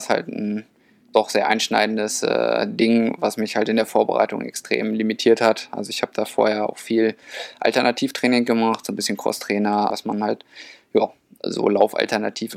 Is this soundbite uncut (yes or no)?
no